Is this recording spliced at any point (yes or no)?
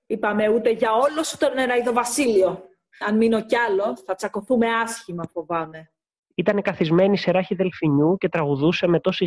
yes